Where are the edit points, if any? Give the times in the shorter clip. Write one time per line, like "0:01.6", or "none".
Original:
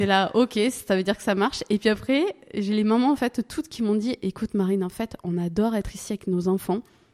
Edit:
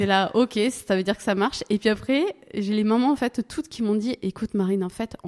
none